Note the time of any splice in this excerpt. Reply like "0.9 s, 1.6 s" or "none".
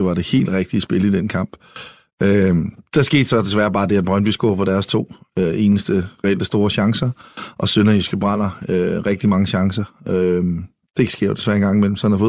none